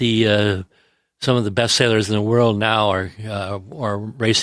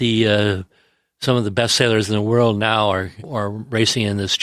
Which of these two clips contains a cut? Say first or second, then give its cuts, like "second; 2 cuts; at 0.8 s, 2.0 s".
second; 1 cut; at 3.2 s